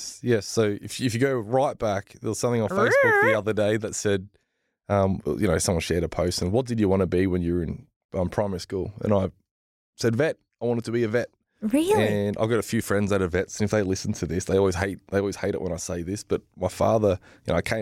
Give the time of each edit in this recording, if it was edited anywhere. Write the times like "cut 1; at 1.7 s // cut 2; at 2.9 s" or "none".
none